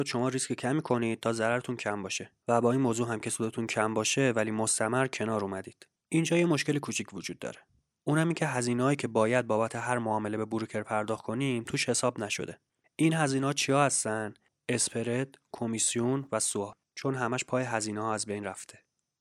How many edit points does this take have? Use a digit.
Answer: 1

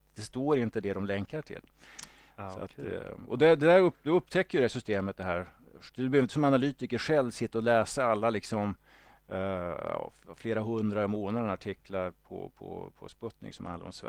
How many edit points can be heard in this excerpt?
0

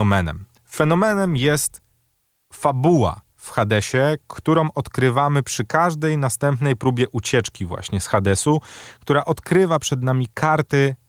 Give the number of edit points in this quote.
0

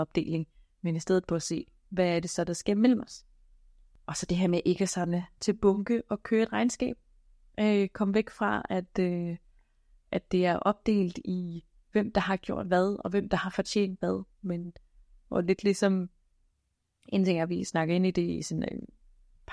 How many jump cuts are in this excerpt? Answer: 0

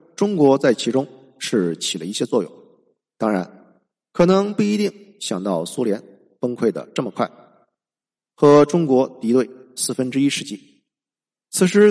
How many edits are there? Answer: 1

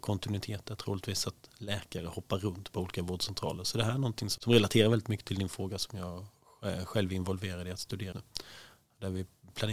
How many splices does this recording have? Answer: 2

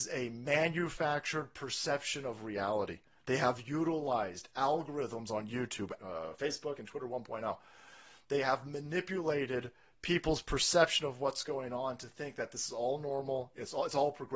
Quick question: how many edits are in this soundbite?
1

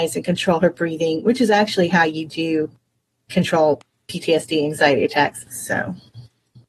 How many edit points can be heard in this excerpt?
1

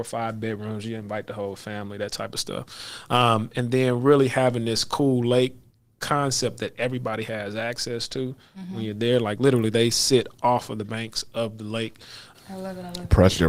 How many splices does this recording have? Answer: 1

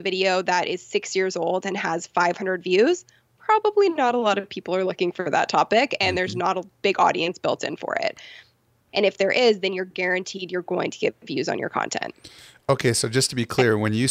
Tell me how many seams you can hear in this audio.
1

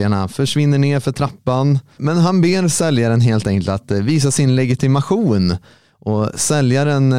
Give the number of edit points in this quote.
1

